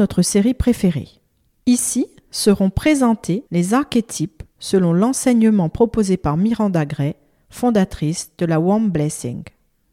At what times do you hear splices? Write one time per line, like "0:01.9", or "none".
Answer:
0:01.5
0:03.5